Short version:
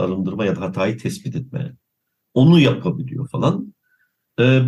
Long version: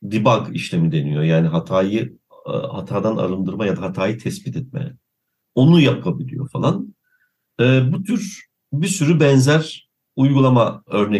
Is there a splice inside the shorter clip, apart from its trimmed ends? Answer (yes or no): no